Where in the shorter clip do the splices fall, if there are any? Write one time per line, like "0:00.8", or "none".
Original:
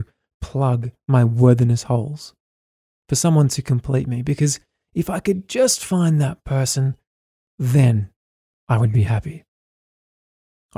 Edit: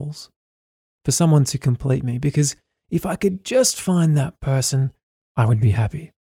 0:05.2